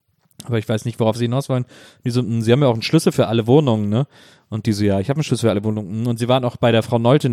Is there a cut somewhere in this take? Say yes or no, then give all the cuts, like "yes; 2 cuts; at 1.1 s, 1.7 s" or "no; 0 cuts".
no; 0 cuts